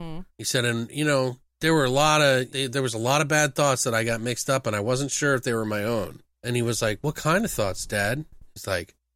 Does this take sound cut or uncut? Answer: cut